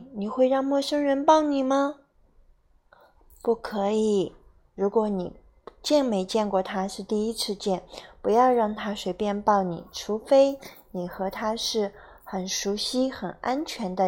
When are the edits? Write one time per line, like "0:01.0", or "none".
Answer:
none